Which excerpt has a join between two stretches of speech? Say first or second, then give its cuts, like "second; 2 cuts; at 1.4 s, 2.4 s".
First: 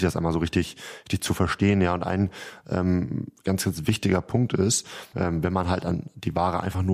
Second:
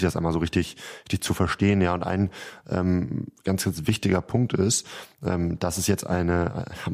first; 1 cut; at 5.1 s